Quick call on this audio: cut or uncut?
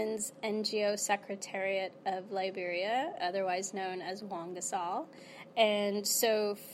cut